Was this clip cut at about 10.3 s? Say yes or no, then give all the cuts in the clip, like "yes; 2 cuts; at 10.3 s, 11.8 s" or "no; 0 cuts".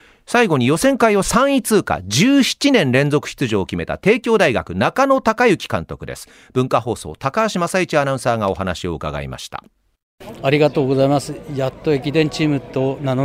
yes; 1 cut; at 10.3 s